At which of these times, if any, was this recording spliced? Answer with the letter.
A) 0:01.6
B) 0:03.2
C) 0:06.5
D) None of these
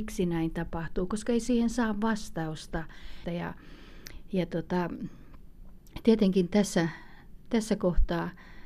B